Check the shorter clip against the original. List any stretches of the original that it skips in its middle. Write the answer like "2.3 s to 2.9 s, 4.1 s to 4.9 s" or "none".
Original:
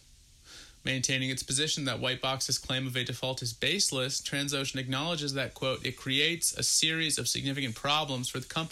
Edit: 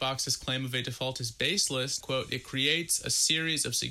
4.2 s to 5.5 s